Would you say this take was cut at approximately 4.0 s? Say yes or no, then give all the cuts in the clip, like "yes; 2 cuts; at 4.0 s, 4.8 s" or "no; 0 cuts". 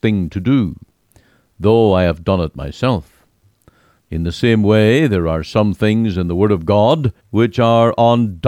yes; 2 cuts; at 4.0 s, 7.2 s